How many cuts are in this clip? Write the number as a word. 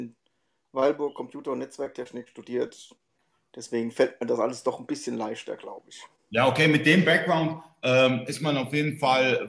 zero